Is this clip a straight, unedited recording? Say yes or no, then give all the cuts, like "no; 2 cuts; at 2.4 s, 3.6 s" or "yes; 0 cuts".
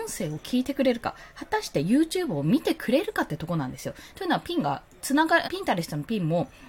no; 2 cuts; at 4.1 s, 5.4 s